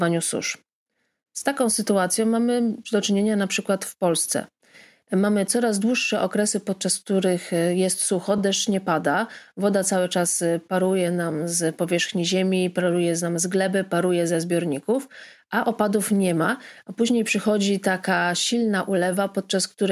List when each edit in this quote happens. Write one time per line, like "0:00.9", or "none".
none